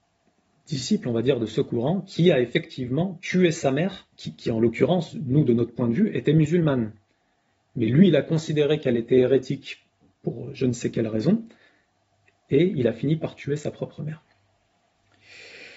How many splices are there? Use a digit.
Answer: 1